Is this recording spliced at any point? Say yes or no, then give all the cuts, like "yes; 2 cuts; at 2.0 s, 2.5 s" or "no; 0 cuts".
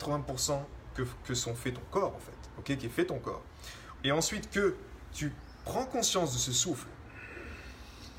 yes; 1 cut; at 4.0 s